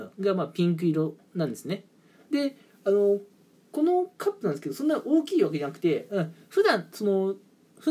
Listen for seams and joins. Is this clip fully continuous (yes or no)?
yes